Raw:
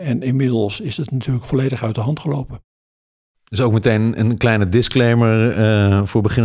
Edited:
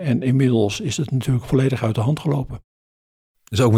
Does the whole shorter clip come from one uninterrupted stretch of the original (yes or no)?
yes